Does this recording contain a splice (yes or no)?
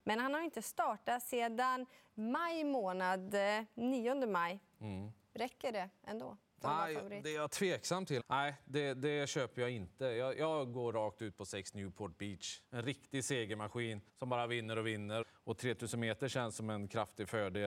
yes